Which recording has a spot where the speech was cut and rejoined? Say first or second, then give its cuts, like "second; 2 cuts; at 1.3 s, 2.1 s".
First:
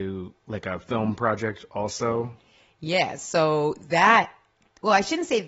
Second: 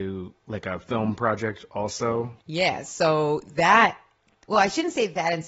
second; 1 cut; at 2.4 s